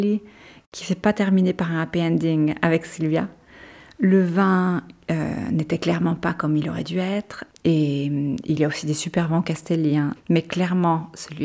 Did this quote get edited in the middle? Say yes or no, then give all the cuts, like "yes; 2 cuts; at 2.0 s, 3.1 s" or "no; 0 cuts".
yes; 2 cuts; at 7.5 s, 10.1 s